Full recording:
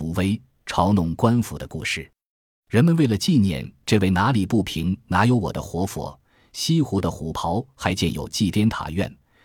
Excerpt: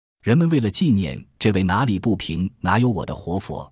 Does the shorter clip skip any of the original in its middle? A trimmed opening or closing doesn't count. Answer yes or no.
no